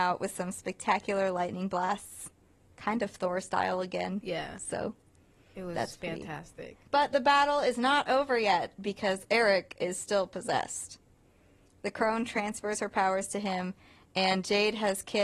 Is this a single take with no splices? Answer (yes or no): no